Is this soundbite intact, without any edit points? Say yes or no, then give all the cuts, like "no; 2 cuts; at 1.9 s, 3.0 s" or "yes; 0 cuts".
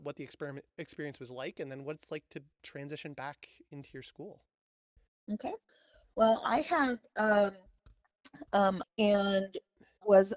no; 1 cut; at 8.8 s